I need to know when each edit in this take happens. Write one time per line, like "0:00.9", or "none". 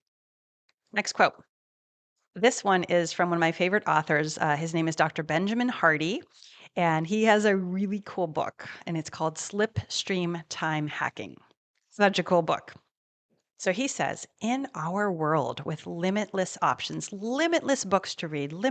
none